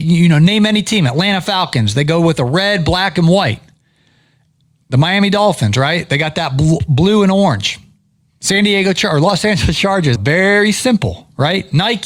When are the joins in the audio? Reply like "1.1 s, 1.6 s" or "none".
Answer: 10.2 s